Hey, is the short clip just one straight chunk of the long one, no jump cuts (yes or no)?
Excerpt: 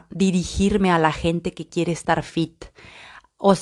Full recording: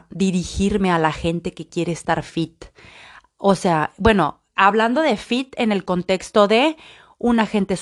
yes